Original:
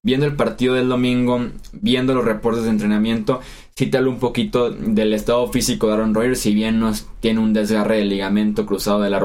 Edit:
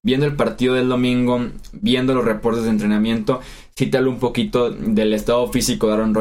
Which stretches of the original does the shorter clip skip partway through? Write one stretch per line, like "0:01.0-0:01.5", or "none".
none